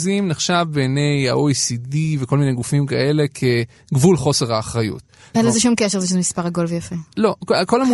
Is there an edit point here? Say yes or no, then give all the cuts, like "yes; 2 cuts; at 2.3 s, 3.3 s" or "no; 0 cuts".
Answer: yes; 1 cut; at 5.3 s